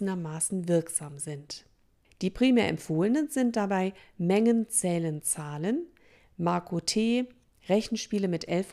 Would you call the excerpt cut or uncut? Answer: uncut